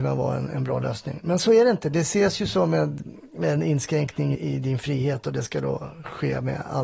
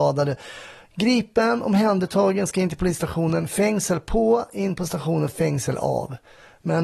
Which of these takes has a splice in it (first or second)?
first